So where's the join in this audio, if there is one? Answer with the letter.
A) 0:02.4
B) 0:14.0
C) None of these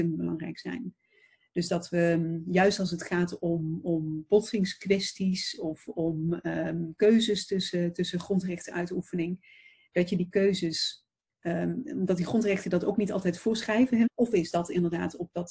B